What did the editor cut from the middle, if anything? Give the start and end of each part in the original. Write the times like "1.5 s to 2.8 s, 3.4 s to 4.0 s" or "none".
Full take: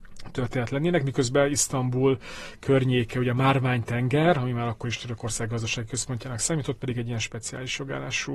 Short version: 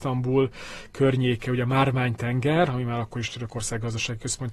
none